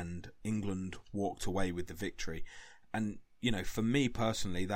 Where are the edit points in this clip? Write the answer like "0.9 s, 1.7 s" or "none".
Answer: none